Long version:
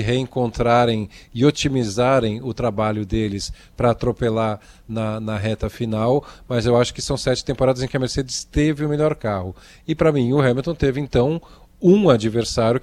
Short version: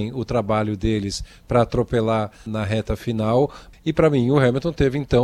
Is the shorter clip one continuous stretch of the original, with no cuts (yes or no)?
no